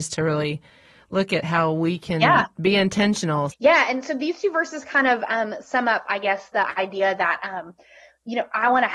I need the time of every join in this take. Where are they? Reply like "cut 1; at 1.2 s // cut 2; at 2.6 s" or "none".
cut 1; at 3.5 s